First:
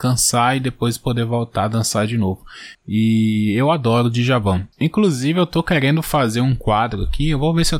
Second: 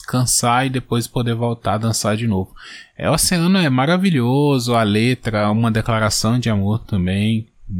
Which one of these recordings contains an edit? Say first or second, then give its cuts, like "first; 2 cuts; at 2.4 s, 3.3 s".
first; 2 cuts; at 2.7 s, 4.7 s